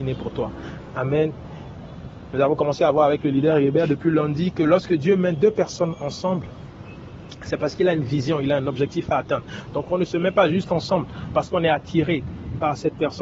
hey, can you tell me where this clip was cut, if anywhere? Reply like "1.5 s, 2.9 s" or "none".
none